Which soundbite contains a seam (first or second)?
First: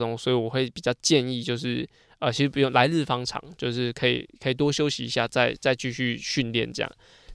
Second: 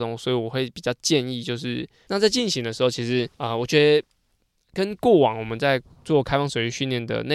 second